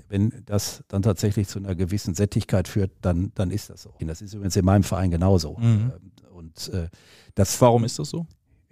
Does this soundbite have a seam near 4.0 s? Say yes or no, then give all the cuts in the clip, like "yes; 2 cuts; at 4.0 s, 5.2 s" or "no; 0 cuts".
yes; 1 cut; at 4.0 s